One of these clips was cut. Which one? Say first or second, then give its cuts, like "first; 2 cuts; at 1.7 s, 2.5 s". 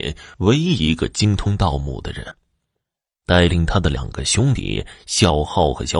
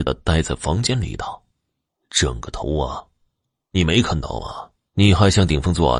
second; 1 cut; at 4.9 s